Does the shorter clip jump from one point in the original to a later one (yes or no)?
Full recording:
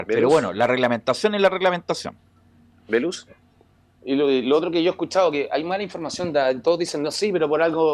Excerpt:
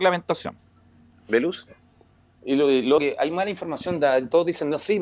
yes